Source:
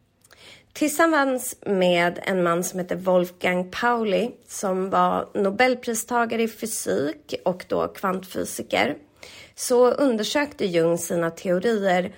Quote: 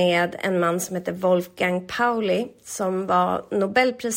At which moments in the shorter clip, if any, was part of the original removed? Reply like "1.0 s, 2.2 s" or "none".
none